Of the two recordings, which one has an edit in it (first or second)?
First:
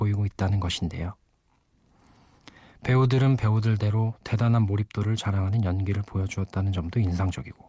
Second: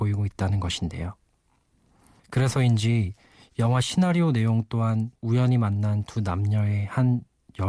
second